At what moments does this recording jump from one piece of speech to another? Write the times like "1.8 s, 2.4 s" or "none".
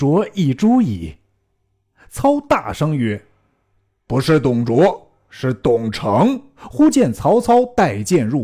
6.6 s